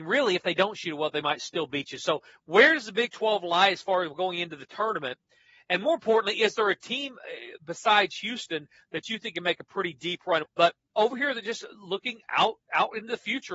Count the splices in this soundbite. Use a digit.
1